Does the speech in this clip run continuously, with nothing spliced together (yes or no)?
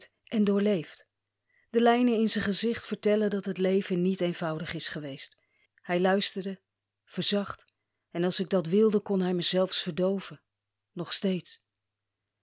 no